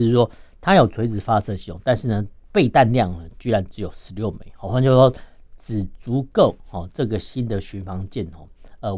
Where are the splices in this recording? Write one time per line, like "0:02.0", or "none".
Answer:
none